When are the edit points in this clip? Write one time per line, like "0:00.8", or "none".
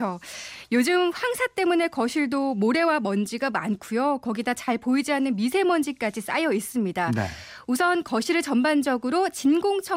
none